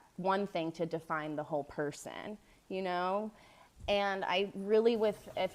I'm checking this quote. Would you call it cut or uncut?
uncut